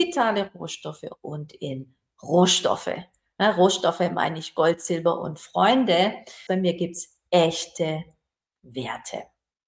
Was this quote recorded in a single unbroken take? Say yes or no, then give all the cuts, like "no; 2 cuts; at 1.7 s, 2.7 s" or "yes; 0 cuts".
no; 1 cut; at 6.5 s